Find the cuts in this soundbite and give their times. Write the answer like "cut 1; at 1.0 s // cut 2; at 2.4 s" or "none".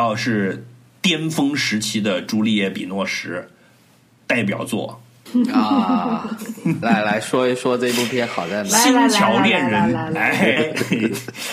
cut 1; at 5.3 s // cut 2; at 6.8 s // cut 3; at 10.6 s